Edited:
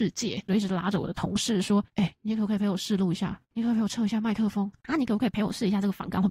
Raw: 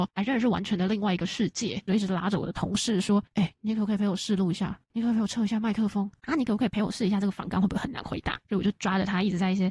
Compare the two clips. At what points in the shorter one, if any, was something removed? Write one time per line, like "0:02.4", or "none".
none